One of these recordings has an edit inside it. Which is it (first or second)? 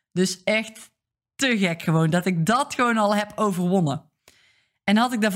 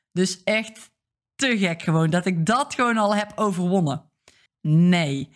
second